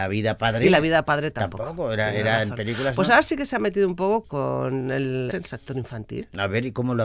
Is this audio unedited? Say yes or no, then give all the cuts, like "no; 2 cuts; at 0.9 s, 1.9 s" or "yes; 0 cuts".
no; 2 cuts; at 4.2 s, 5.3 s